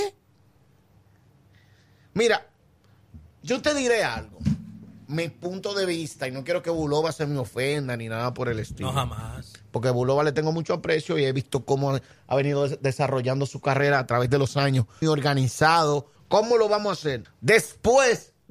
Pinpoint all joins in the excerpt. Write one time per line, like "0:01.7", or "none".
0:15.0
0:16.2
0:17.2